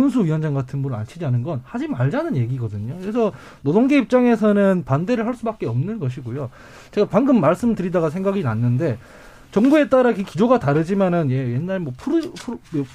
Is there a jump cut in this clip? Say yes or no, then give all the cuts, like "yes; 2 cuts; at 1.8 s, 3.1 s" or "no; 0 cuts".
no; 0 cuts